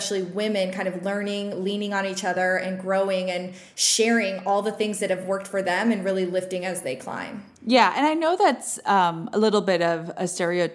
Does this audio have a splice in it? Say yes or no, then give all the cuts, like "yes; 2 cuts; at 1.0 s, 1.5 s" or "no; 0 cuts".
yes; 1 cut; at 7.5 s